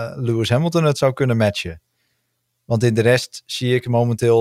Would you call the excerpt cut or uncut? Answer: uncut